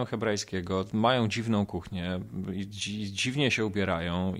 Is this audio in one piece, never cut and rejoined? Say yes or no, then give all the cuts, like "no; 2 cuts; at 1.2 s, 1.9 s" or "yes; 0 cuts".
yes; 0 cuts